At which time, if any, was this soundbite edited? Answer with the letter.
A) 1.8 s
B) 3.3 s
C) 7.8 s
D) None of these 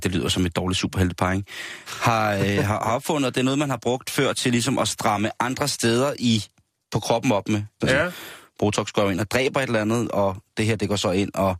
C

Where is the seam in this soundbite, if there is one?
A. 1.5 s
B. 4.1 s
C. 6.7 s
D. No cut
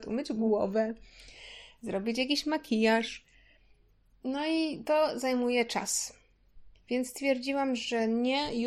C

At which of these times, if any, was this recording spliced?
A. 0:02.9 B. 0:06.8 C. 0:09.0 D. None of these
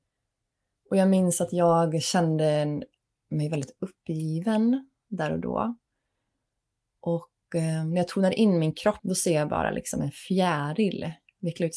C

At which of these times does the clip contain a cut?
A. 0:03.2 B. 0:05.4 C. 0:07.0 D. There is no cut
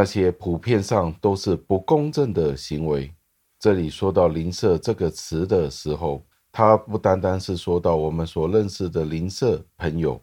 D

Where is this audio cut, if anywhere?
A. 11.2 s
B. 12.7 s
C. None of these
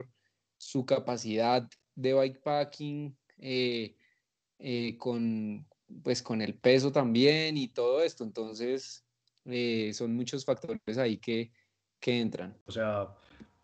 B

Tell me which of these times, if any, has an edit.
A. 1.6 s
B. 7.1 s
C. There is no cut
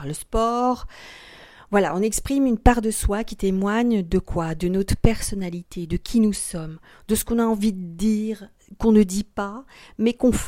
C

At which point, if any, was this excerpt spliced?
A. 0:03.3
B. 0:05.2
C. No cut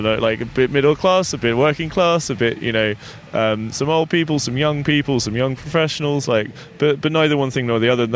C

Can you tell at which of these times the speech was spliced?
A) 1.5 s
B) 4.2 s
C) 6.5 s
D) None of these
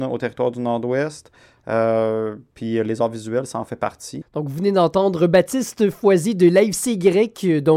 B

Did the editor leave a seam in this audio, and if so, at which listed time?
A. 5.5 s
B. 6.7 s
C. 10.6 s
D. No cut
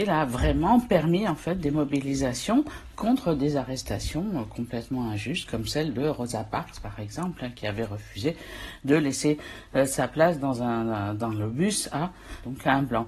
D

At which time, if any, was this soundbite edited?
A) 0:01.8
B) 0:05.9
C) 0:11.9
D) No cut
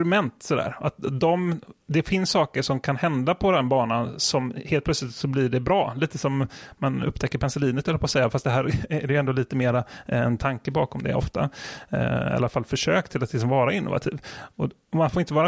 A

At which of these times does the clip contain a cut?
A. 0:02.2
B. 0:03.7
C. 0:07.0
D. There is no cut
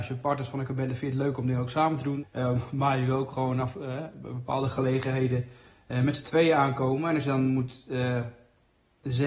A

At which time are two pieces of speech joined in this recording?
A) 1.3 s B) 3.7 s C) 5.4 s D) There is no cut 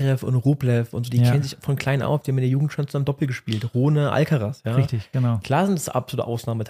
D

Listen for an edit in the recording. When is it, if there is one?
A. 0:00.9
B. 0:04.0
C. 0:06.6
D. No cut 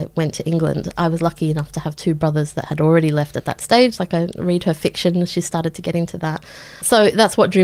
B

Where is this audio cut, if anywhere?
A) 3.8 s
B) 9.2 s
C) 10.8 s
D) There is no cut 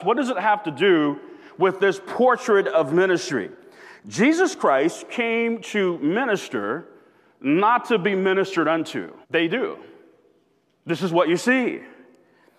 B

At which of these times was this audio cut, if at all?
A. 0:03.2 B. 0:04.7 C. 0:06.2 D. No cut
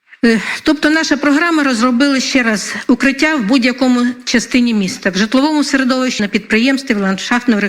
C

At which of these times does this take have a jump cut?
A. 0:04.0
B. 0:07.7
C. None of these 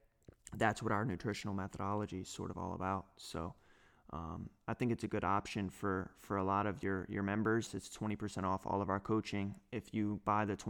B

